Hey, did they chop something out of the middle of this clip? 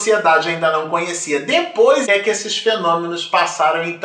yes; 1 cut; at 2.0 s

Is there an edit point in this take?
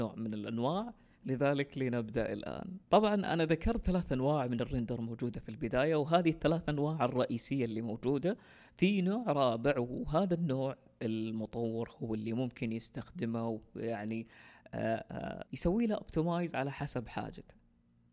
yes; 2 cuts; at 2.8 s, 15.5 s

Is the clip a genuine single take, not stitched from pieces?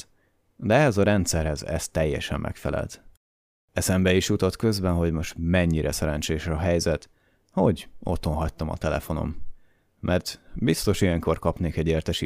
yes; 0 cuts

